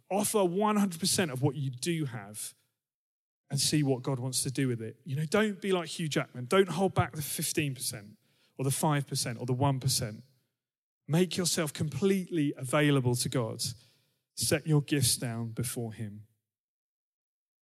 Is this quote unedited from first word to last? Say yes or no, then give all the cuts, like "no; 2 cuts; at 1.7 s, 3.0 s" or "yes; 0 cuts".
yes; 0 cuts